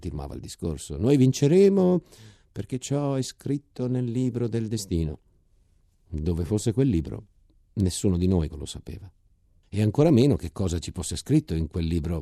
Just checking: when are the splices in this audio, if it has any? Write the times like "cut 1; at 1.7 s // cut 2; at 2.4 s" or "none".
cut 1; at 8.5 s